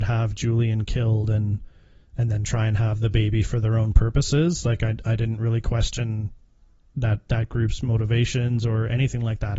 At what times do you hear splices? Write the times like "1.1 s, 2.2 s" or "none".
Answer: none

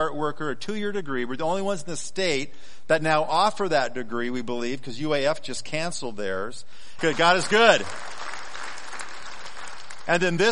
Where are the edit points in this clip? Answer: 7.0 s

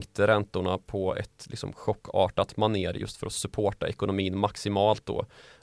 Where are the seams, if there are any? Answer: none

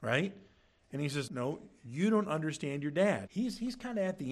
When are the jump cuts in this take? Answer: 1.3 s, 3.3 s

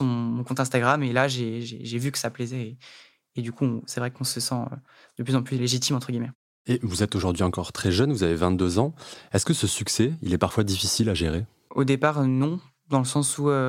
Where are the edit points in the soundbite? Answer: none

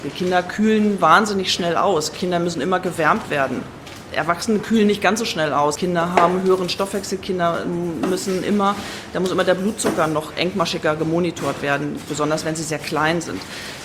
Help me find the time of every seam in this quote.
5.8 s

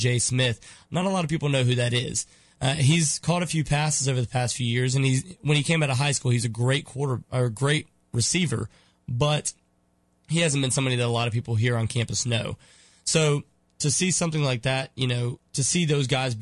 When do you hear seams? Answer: none

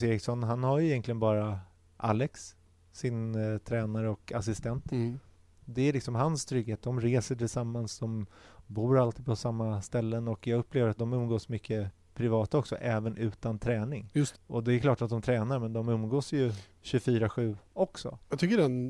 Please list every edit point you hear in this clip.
11.0 s, 14.3 s

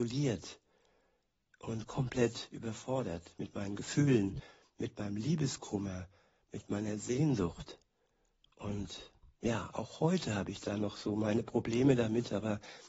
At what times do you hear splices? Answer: none

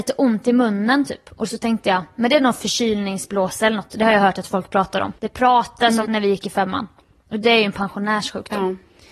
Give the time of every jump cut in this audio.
6.0 s

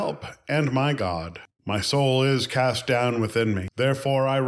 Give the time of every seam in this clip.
none

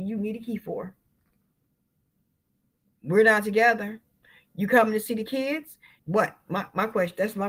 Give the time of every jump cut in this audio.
6.0 s

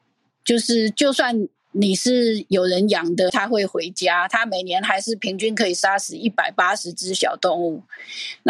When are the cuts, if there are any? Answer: 3.3 s

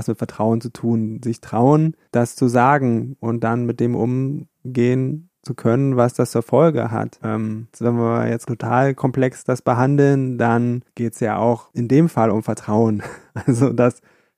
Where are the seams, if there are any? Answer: 7.2 s

